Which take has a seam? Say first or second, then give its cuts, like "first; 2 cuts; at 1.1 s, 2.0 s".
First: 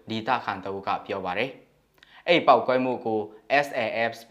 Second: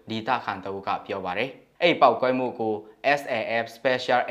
second; 1 cut; at 1.8 s